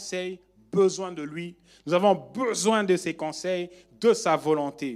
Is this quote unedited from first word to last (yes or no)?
yes